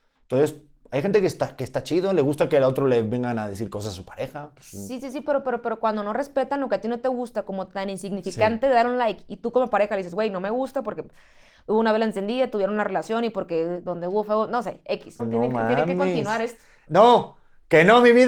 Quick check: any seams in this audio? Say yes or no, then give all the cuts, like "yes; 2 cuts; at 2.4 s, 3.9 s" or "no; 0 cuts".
yes; 2 cuts; at 15.2 s, 16.9 s